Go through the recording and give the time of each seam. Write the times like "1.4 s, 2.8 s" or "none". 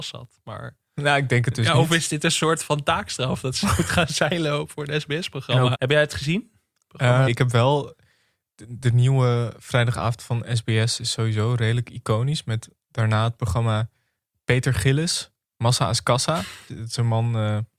5.7 s, 7.3 s, 16.7 s

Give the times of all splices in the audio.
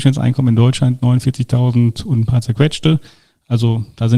none

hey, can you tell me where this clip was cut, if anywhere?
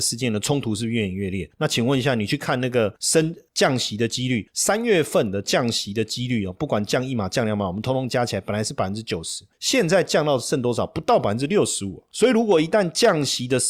none

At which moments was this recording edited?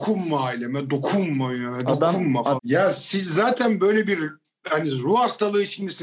2.6 s

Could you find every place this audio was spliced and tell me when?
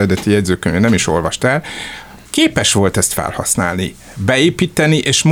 2.2 s

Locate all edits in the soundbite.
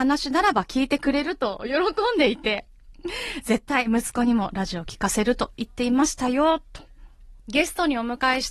7.4 s

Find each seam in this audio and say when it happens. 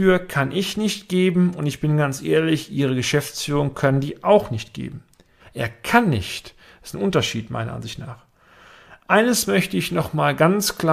5.4 s

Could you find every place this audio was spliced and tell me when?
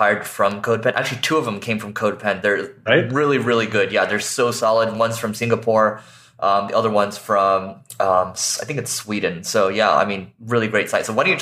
2.9 s

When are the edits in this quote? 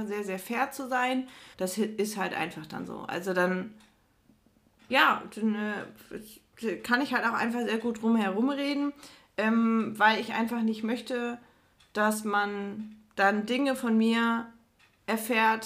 1.5 s

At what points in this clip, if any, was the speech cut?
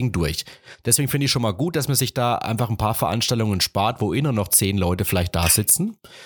none

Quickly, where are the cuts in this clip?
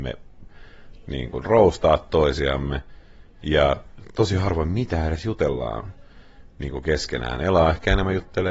none

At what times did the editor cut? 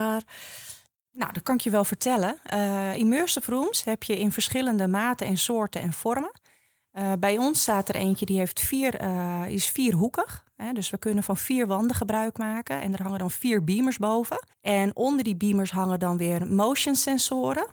14.5 s

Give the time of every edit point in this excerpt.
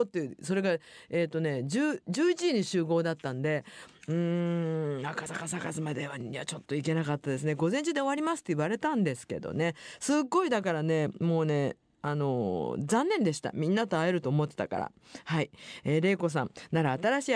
none

